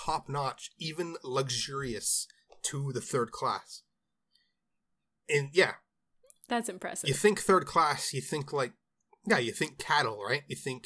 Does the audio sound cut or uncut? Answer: uncut